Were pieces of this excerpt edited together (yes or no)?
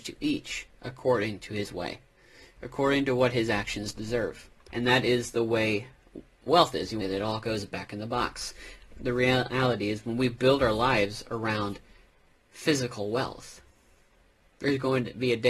yes